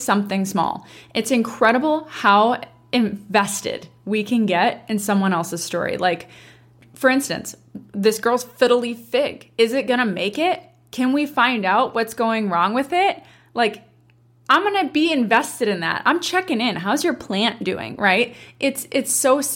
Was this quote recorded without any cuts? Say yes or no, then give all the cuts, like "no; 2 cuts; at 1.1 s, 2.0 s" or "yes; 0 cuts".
yes; 0 cuts